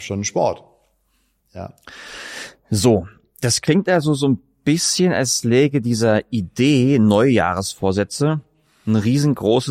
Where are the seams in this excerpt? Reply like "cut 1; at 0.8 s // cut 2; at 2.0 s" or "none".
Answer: cut 1; at 1.4 s

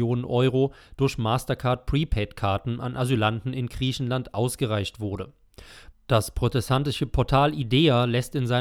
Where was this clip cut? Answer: cut 1; at 5.9 s

